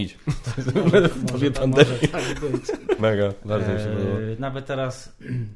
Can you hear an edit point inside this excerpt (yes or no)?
yes